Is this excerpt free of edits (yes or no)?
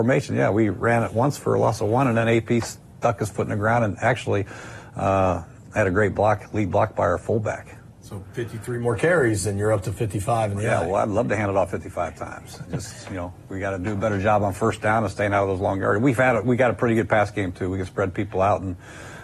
yes